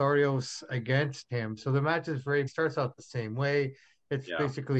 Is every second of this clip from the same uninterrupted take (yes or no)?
no